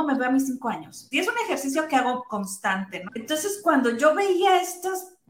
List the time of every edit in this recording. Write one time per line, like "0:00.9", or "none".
0:01.1
0:03.1